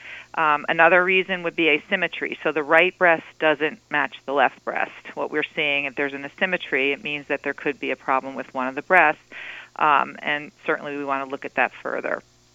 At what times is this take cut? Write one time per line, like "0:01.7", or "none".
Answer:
none